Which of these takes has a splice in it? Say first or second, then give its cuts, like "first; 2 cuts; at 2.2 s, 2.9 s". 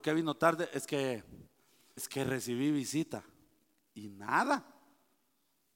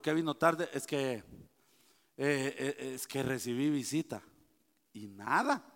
first; 1 cut; at 2.0 s